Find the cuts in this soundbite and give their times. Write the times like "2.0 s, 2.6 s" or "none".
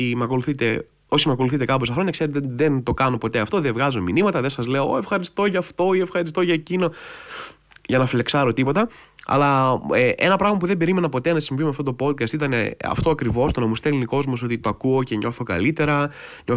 none